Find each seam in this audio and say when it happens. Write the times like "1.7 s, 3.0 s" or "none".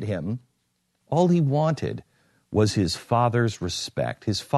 1.0 s